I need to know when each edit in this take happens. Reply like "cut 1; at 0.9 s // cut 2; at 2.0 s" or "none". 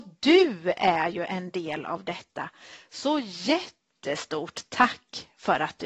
cut 1; at 3.9 s